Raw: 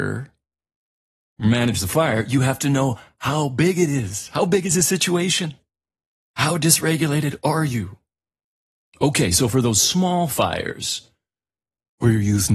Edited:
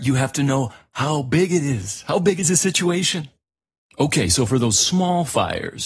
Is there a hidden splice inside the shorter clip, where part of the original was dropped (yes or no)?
yes